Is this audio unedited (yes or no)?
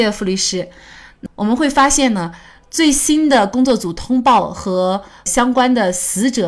yes